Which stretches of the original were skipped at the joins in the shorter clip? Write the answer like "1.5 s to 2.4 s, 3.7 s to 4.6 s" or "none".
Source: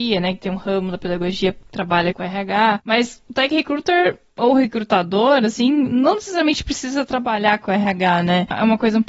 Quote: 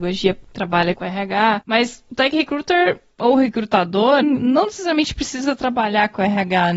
5.4 s to 5.7 s